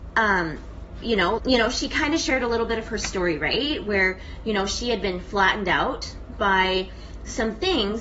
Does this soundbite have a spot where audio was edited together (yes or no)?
yes